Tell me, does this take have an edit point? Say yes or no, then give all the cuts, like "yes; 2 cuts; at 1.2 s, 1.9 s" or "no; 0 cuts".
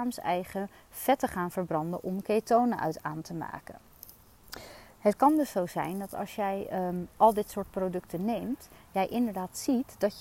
no; 0 cuts